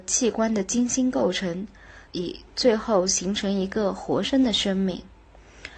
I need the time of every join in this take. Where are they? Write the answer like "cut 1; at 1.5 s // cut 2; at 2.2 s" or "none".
cut 1; at 2.0 s // cut 2; at 4.2 s